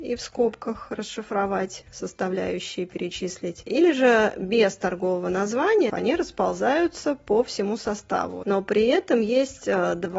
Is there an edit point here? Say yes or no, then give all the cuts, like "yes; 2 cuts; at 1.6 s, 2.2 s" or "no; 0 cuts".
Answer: yes; 2 cuts; at 5.9 s, 8.4 s